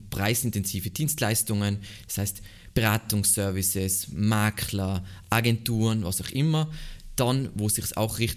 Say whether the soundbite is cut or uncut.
uncut